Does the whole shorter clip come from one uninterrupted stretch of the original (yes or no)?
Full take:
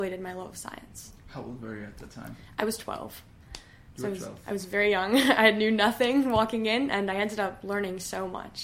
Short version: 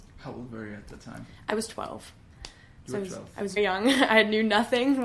no